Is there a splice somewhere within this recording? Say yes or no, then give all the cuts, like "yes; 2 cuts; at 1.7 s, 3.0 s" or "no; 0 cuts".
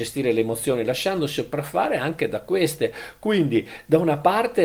no; 0 cuts